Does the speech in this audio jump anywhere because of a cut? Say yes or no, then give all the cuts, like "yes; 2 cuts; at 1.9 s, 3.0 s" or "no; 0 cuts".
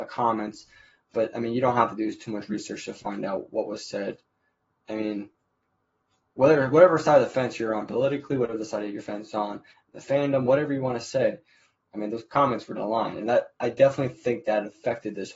yes; 1 cut; at 12.8 s